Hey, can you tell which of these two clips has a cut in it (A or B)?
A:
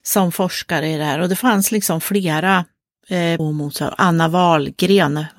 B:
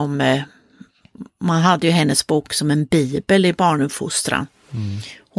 A